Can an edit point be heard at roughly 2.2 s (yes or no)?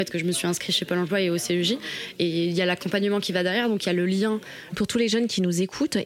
no